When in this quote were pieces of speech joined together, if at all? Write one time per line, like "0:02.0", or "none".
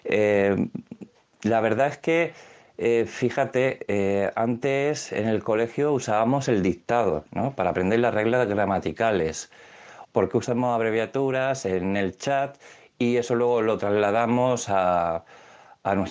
0:10.0